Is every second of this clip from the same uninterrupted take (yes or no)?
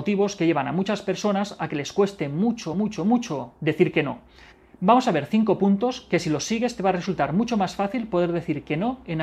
yes